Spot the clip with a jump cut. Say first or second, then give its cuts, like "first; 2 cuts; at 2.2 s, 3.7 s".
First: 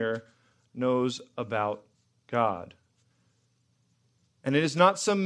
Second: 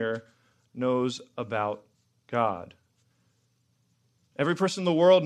second; 1 cut; at 4.3 s